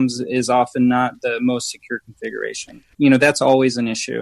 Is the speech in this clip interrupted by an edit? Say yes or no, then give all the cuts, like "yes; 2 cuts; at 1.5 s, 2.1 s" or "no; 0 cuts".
yes; 1 cut; at 2.9 s